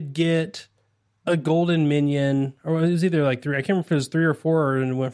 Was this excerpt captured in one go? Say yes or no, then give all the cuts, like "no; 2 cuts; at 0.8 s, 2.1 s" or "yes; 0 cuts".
yes; 0 cuts